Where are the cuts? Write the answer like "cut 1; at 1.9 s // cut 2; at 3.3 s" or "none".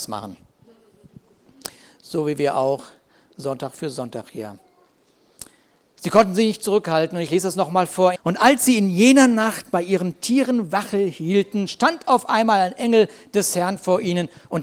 cut 1; at 8.2 s